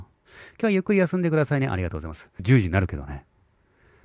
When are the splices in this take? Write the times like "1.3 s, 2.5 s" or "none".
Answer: 2.4 s